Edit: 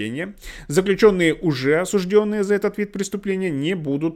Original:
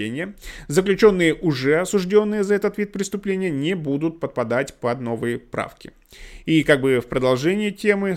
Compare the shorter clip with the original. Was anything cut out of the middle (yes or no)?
no